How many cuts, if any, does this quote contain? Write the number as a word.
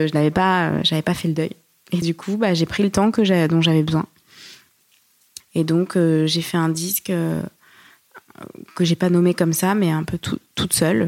two